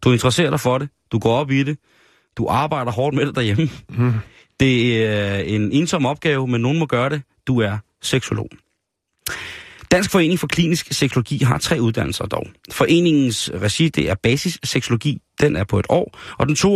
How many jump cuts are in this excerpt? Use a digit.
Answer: 0